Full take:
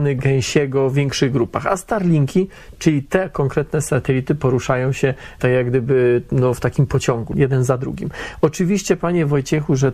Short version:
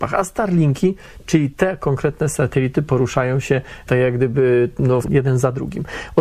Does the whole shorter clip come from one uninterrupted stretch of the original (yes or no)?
no